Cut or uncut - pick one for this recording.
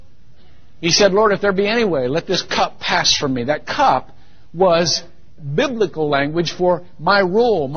cut